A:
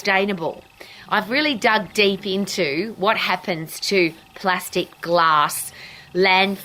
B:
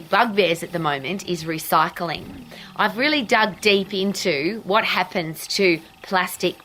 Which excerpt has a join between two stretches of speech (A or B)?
A